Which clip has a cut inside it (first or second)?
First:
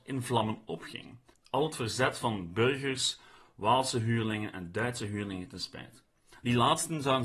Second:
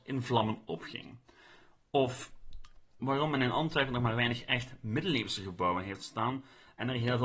first